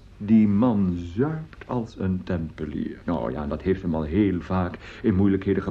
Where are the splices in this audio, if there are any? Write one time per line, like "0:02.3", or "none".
0:03.0